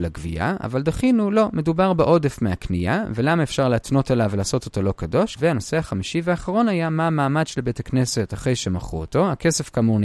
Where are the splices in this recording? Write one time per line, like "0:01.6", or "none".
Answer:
0:05.4